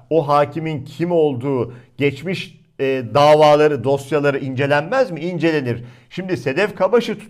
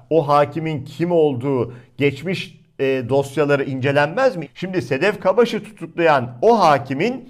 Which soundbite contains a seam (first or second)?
second